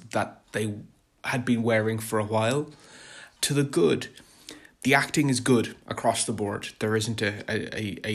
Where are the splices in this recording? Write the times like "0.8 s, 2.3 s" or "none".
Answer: 3.4 s